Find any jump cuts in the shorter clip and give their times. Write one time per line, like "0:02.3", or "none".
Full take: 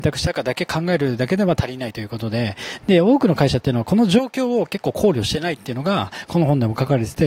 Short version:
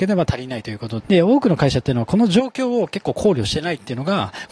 0:01.0

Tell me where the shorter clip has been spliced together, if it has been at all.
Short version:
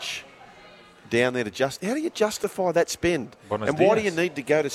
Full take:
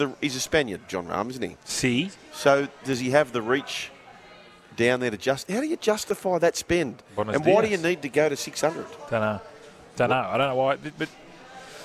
none

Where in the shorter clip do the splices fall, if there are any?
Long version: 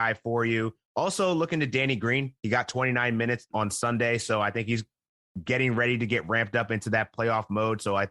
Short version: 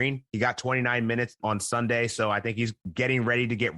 0:02.8

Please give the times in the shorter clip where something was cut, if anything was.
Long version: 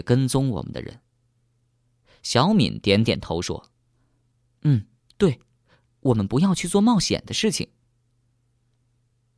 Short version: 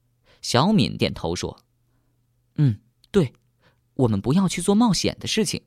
0:01.0

